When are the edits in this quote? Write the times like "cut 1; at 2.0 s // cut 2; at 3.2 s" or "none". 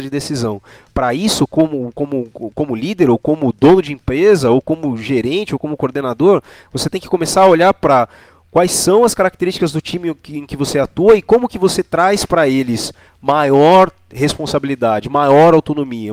none